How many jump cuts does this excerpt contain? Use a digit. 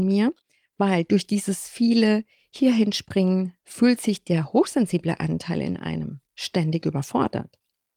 1